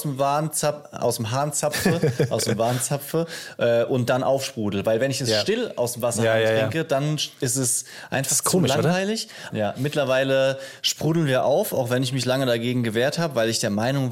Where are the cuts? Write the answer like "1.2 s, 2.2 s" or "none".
9.5 s

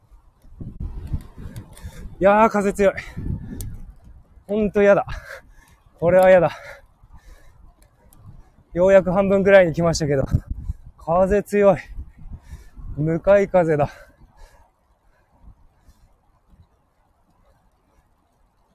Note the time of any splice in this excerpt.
none

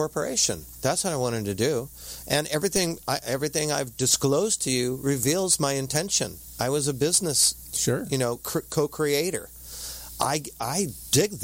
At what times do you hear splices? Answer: none

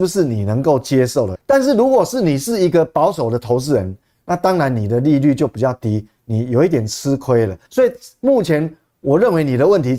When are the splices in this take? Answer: 1.3 s, 4.1 s, 7.7 s

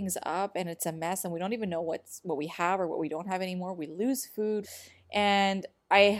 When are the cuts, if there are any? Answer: 4.6 s

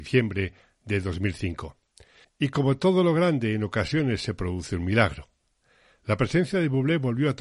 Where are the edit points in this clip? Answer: 2.2 s

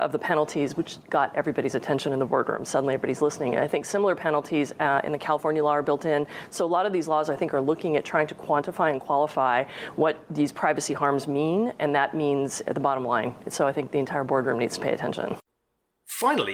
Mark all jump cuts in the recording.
6.5 s

